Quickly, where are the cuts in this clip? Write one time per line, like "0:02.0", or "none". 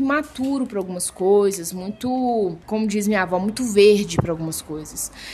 0:02.6

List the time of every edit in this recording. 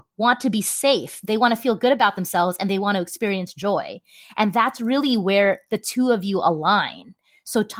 none

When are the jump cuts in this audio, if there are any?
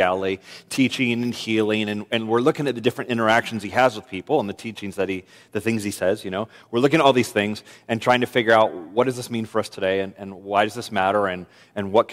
none

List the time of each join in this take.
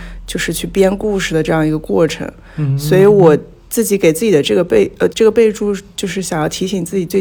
0:05.1

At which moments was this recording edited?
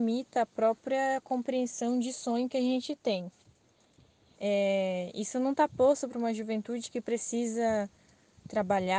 0:04.3

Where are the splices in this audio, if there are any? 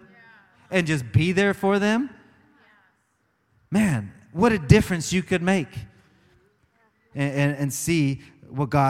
0:07.1

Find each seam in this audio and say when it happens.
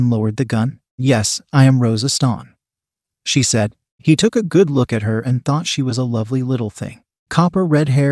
none

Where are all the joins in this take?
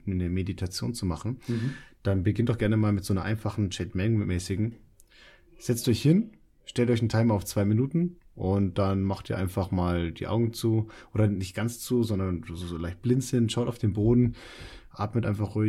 none

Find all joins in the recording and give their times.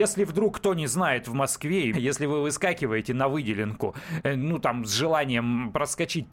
0:01.9

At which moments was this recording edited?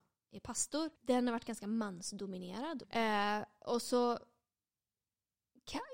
0:01.0
0:02.8

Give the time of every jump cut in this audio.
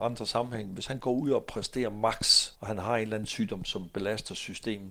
0:02.5

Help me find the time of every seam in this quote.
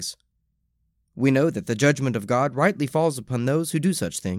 none

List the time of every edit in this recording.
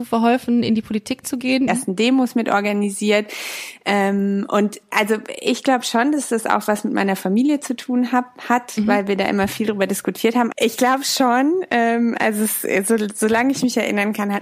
0:01.7
0:10.5

